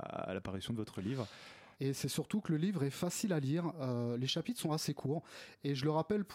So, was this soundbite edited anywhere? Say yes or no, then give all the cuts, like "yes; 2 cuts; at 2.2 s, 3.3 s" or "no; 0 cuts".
yes; 1 cut; at 1.7 s